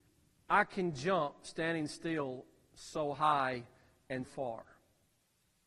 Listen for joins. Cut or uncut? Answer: cut